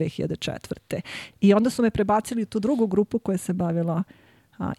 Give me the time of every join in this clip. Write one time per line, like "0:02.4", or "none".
0:01.3